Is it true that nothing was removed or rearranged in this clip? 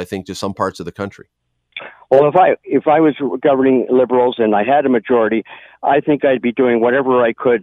yes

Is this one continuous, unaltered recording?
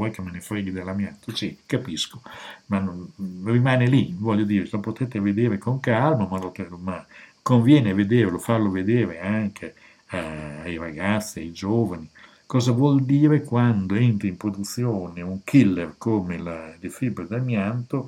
yes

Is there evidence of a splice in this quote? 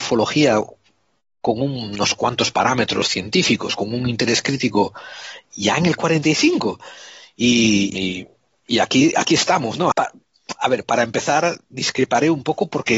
yes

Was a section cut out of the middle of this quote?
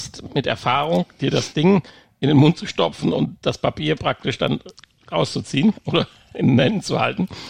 no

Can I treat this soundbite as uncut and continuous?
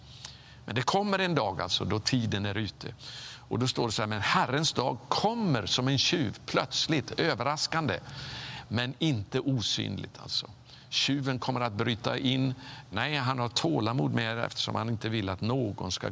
no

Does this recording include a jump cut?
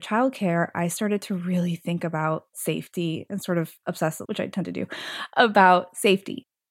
yes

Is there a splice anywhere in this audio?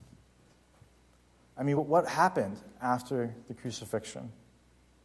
no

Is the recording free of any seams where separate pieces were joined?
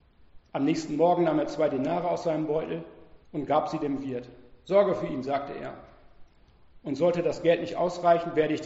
no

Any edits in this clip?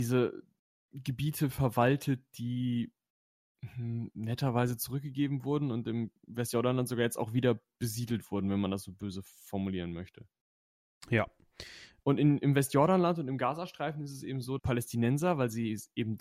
yes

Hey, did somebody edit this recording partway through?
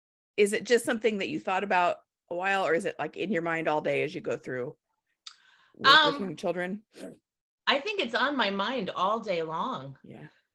no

